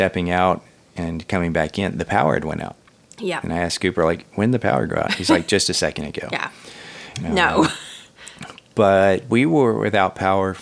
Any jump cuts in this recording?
yes; 1 cut; at 7.1 s

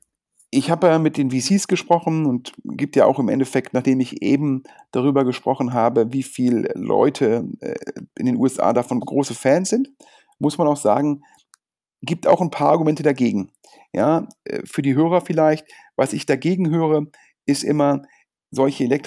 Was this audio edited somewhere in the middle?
yes; 1 cut; at 9.0 s

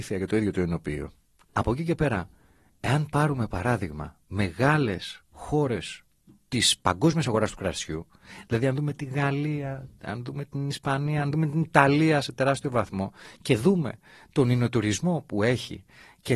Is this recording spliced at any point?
yes; 1 cut; at 1.5 s

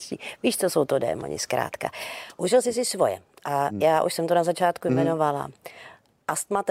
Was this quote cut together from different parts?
no; 0 cuts

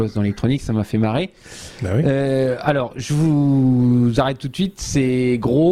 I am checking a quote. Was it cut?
no; 0 cuts

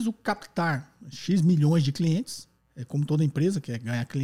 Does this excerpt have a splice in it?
no; 0 cuts

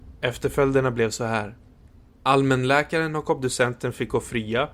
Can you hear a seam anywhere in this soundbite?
no; 0 cuts

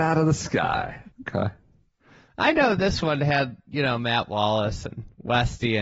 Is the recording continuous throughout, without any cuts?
no; 1 cut; at 1.1 s

